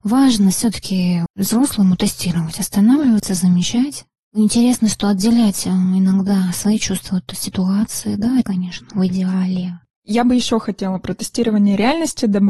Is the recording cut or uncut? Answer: cut